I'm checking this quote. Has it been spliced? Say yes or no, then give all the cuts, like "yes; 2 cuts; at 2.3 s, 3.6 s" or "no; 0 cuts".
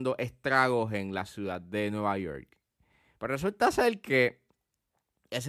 yes; 1 cut; at 3.2 s